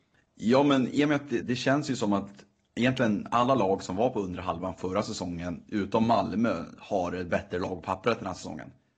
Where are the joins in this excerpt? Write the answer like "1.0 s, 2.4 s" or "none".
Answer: 1.4 s